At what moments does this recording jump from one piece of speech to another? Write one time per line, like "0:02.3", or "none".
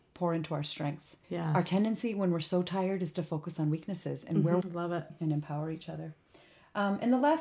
0:01.2
0:04.6